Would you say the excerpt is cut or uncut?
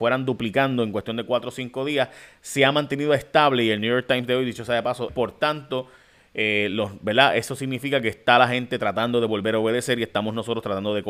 cut